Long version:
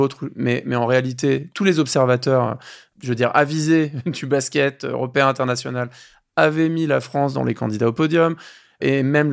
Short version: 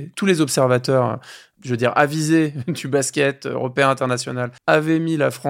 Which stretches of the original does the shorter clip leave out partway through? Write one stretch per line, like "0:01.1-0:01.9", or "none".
0:06.0-0:06.3